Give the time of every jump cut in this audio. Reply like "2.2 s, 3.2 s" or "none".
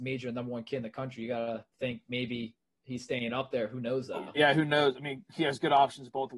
1.7 s, 4.4 s